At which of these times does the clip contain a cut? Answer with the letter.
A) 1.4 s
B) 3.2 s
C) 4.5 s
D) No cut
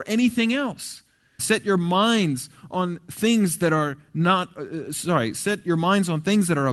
A